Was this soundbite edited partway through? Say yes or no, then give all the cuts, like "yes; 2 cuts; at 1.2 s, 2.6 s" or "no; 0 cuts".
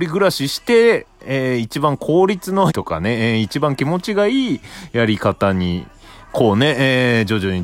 yes; 1 cut; at 2.7 s